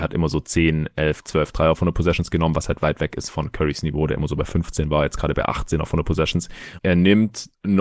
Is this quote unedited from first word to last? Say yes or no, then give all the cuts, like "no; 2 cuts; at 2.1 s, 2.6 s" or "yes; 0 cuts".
no; 1 cut; at 6.8 s